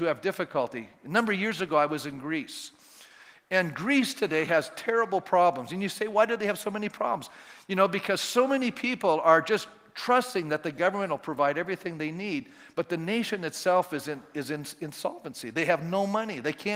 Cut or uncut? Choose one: uncut